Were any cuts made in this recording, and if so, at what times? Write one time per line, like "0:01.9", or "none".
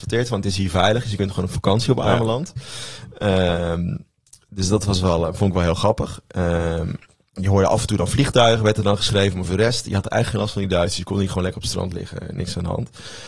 none

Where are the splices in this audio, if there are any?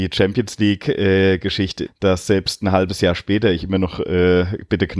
0:01.9

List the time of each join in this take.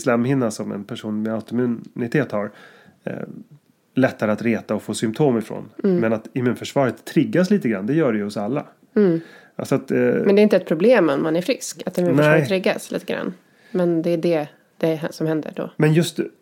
none

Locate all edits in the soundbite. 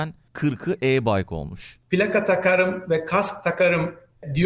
0:01.8

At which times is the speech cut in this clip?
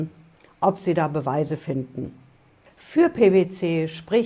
0:02.7

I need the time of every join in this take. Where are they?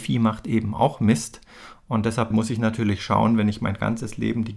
0:02.3

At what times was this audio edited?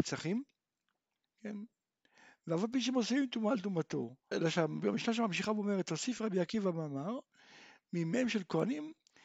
0:01.2
0:04.3

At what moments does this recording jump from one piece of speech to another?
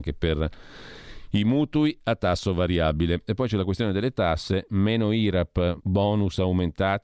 0:05.8

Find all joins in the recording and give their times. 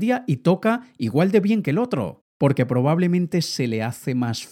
none

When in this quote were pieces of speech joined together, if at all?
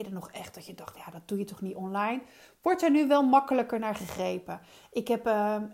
none

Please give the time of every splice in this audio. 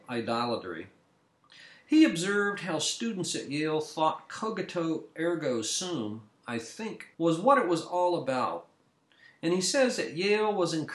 0:07.1

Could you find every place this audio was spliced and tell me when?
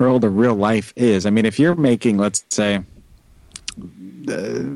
0:03.8

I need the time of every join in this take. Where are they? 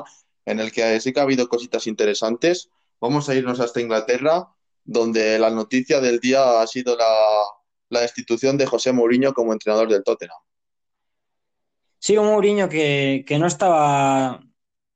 none

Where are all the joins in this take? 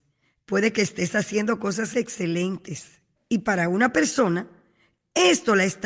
0:01.9
0:03.2

